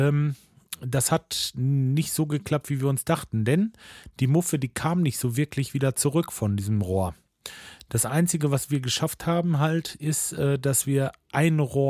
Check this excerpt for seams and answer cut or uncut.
uncut